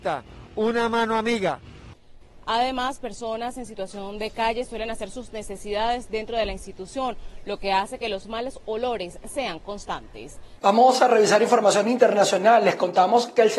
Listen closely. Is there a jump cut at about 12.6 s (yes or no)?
no